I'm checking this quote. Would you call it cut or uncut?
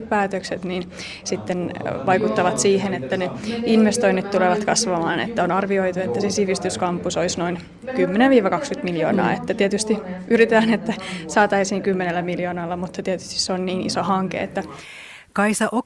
uncut